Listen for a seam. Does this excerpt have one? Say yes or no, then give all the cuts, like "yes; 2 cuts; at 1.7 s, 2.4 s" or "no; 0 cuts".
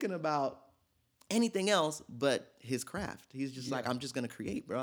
no; 0 cuts